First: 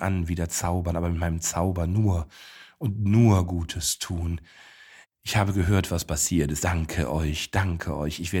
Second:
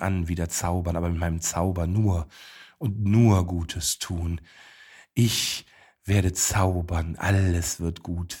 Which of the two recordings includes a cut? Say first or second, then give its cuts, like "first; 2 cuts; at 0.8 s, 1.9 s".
first; 2 cuts; at 5.0 s, 6.6 s